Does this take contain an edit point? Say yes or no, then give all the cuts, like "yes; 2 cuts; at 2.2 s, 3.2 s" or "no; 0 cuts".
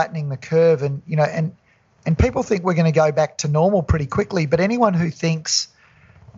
no; 0 cuts